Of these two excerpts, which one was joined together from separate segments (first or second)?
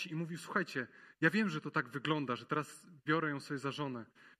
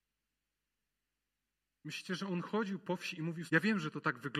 second